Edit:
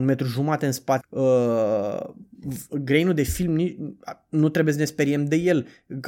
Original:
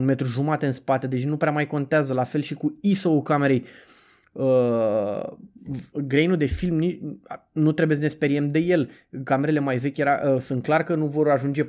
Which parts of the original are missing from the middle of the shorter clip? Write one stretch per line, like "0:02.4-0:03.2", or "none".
0:01.0-0:04.2